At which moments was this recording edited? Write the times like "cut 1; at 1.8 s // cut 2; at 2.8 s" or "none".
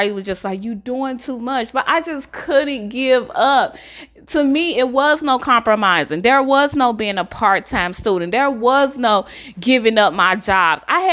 none

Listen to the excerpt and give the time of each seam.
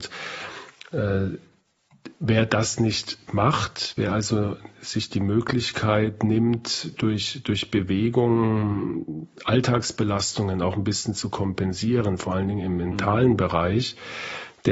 none

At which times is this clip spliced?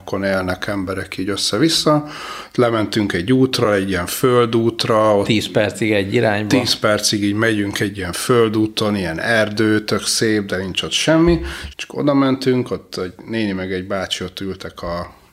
cut 1; at 11.7 s

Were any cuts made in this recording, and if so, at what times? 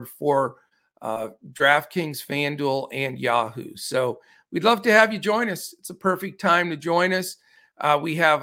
none

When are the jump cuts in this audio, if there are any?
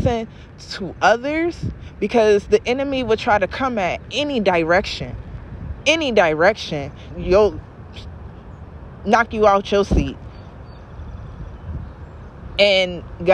cut 1; at 7.1 s

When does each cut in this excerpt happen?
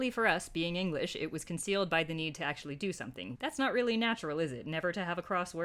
cut 1; at 3.3 s

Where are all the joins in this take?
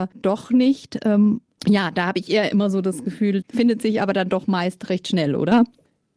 cut 1; at 3.4 s

